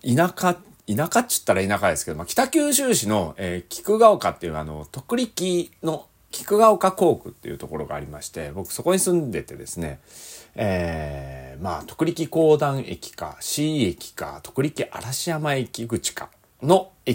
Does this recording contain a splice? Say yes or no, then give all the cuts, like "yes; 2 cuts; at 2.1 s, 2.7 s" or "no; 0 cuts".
yes; 1 cut; at 6.3 s